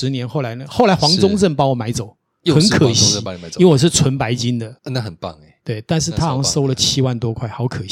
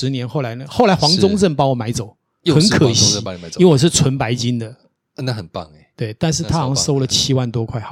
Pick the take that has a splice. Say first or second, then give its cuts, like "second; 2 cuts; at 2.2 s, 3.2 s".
first; 1 cut; at 4.8 s